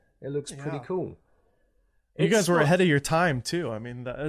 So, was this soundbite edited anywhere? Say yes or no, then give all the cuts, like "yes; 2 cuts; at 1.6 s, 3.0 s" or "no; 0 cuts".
no; 0 cuts